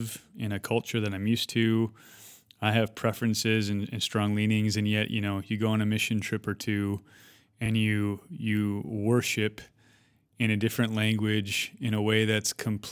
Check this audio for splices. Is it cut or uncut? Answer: uncut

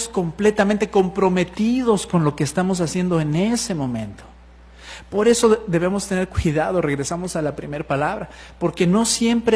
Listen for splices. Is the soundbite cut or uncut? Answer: uncut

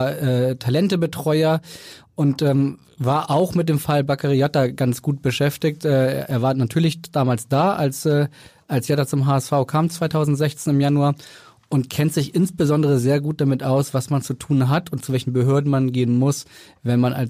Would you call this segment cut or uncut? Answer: uncut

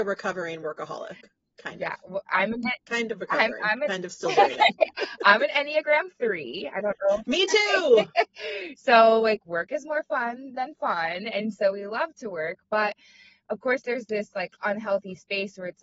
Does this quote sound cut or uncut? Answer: uncut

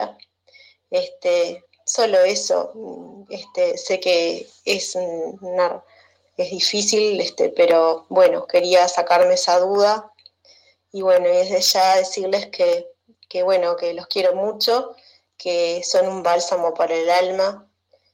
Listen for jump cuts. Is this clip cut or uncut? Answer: uncut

